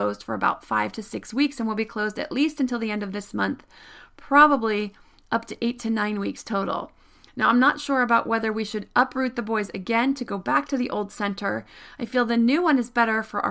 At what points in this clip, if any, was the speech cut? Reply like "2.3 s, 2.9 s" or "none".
none